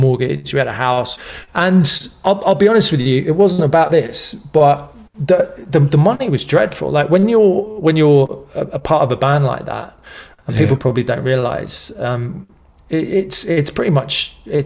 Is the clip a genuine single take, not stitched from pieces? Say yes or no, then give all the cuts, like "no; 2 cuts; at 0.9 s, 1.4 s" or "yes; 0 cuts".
yes; 0 cuts